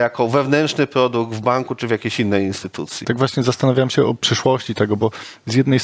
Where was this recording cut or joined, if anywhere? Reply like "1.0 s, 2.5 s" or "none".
3.0 s